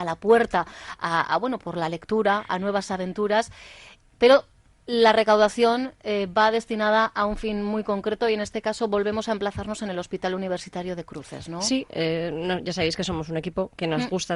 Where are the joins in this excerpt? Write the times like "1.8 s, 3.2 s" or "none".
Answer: 1.6 s